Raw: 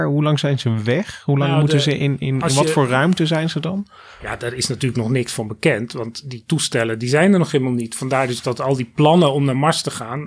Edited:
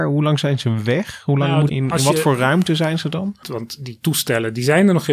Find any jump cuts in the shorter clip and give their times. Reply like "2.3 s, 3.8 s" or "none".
1.7 s, 3.4 s